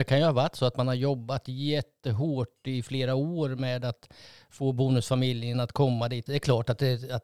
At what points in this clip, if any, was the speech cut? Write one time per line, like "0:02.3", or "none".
0:06.3